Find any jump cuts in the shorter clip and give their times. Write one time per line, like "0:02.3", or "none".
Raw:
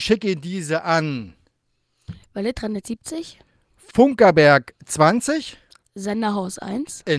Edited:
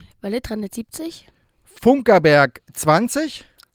none

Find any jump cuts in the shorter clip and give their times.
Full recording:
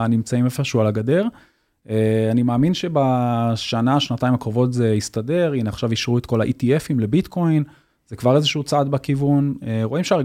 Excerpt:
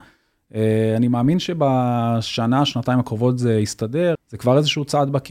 0:04.2

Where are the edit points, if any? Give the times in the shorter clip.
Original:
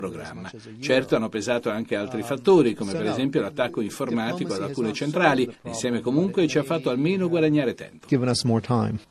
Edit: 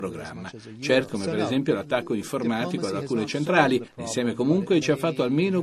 0:01.1

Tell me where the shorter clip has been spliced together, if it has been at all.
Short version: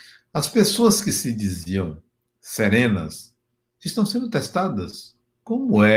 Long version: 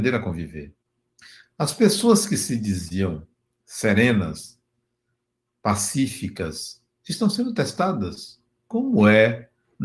0:03.8

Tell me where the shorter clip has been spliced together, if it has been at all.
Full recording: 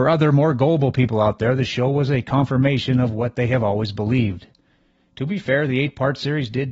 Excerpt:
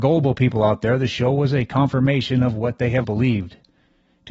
0:03.0

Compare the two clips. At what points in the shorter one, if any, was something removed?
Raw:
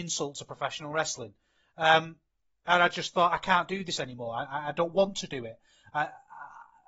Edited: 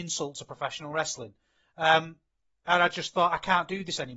none

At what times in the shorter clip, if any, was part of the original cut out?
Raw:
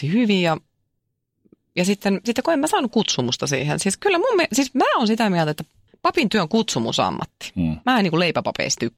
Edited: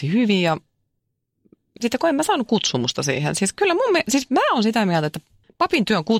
0:01.8

